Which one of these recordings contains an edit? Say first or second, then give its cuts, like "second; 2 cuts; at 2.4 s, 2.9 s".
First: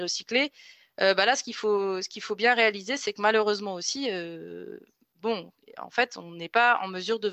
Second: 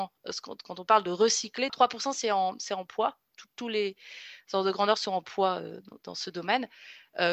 second; 1 cut; at 1.7 s